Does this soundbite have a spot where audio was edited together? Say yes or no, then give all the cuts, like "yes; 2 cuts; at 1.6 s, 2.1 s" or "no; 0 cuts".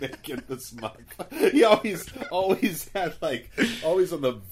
no; 0 cuts